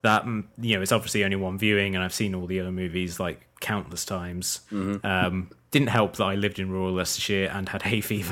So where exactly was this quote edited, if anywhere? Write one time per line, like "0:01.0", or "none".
0:05.0